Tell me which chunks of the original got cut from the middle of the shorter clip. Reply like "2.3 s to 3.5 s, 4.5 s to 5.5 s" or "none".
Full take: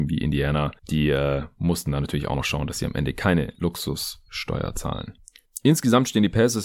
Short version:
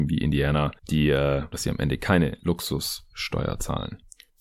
1.5 s to 2.7 s